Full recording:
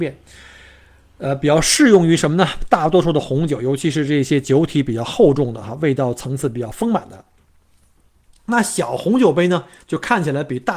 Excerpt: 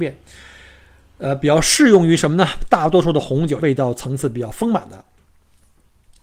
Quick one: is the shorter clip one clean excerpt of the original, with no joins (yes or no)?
no